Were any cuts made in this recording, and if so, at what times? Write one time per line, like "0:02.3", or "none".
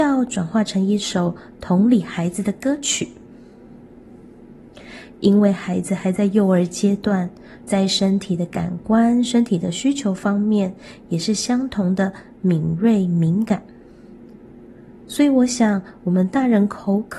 0:07.6